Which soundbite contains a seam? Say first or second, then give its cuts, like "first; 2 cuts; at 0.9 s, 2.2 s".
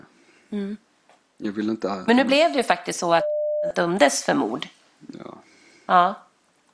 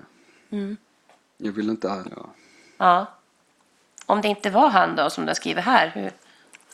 second; 1 cut; at 2.0 s